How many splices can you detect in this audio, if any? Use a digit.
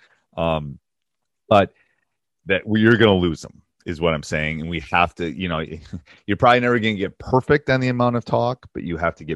0